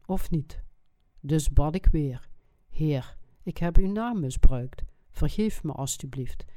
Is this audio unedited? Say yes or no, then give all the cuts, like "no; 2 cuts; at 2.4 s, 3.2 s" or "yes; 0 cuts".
yes; 0 cuts